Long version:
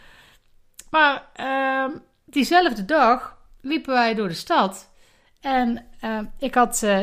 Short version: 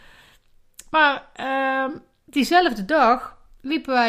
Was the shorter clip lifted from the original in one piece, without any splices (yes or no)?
yes